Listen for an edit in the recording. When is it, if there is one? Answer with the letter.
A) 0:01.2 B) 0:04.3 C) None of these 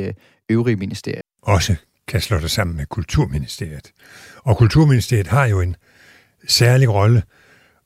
A